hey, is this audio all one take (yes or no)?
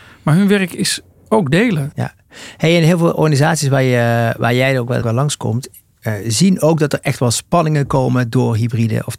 no